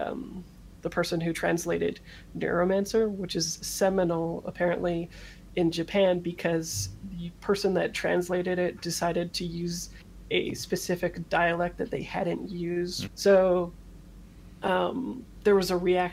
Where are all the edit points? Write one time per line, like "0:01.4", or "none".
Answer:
0:13.1